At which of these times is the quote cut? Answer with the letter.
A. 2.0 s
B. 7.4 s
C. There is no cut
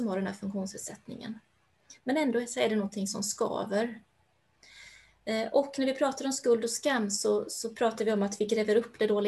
C